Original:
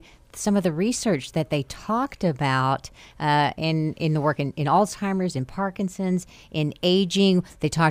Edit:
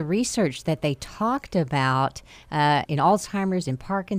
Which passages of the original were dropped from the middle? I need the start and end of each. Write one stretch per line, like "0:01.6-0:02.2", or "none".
0:03.5-0:04.5

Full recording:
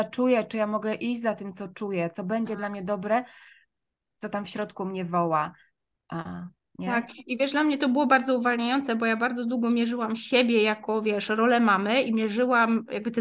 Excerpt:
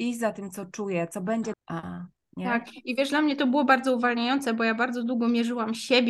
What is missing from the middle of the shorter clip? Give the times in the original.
0:02.6-0:06.0

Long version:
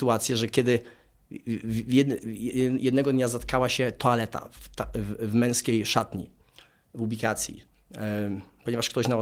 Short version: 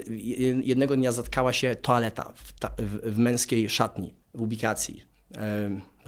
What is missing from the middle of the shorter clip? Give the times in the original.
0:06.4-0:06.8

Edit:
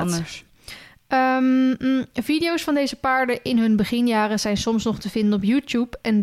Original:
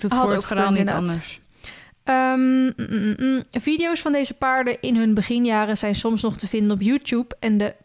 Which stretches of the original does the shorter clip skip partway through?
0:02.7-0:03.2

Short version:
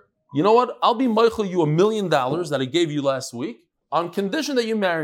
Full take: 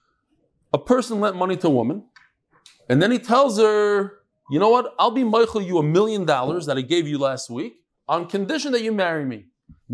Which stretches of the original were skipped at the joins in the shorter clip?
none

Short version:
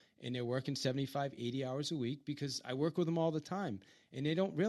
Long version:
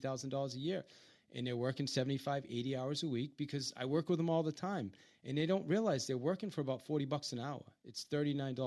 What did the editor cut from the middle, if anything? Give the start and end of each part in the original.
none

